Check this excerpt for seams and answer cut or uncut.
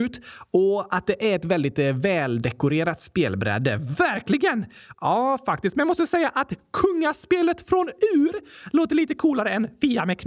cut